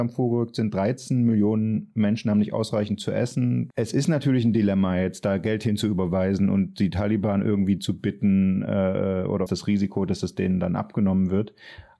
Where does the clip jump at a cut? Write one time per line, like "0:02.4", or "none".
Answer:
0:03.7
0:09.5